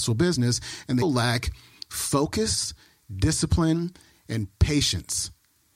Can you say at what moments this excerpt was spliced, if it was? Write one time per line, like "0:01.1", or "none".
0:01.0